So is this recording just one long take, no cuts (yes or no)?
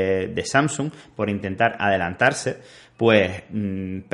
yes